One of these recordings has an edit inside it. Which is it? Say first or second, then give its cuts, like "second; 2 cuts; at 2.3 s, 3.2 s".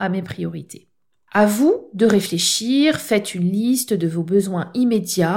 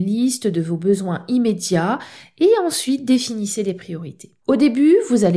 second; 1 cut; at 4.4 s